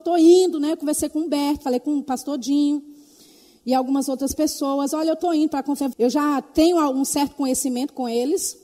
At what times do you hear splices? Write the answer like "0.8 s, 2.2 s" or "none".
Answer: 5.9 s